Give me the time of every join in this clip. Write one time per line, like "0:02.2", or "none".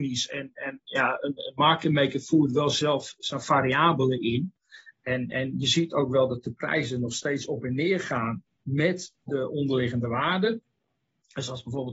none